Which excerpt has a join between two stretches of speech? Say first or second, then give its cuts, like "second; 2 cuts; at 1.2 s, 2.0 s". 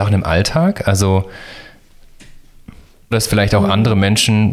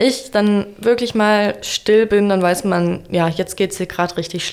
first; 1 cut; at 3.1 s